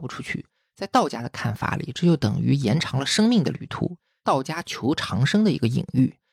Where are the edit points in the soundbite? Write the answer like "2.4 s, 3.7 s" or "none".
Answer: 4.1 s